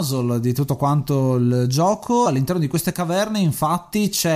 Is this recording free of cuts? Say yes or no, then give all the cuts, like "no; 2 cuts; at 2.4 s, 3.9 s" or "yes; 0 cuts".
yes; 0 cuts